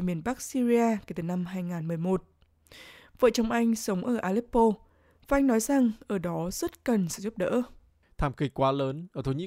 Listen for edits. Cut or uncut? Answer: uncut